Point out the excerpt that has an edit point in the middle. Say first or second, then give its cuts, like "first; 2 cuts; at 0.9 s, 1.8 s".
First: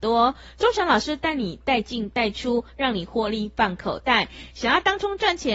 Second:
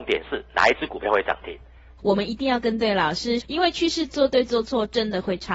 second; 2 cuts; at 2.0 s, 3.4 s